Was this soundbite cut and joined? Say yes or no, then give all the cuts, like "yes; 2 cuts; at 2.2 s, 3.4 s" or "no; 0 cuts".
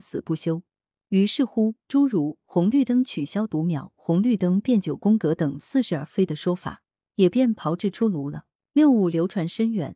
no; 0 cuts